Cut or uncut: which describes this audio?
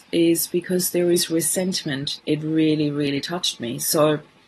cut